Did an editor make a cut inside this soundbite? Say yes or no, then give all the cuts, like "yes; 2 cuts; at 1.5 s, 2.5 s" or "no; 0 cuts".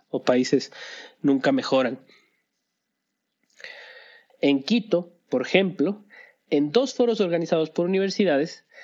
yes; 1 cut; at 4.3 s